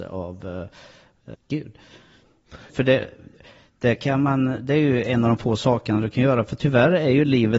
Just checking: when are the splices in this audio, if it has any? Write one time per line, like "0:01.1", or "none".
0:01.3
0:02.7